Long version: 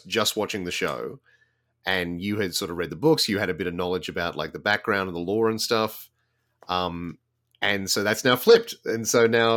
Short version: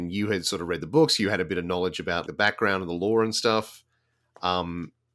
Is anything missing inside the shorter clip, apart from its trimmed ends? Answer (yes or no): yes